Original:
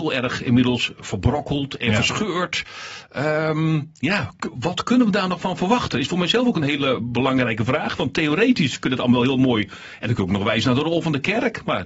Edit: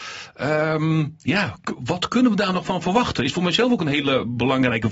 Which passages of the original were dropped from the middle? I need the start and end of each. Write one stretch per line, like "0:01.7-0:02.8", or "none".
none